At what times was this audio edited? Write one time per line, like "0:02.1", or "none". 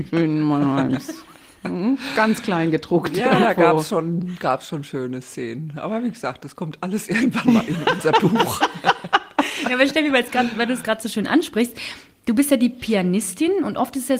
none